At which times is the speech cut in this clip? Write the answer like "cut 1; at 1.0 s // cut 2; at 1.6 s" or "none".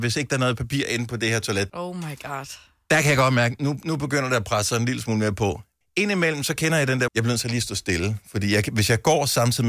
cut 1; at 1.7 s // cut 2; at 5.8 s // cut 3; at 7.1 s